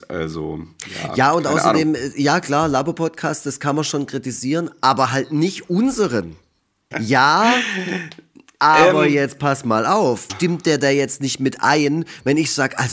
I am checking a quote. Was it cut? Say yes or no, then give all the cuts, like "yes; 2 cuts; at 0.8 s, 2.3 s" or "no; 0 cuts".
yes; 2 cuts; at 6.9 s, 10.3 s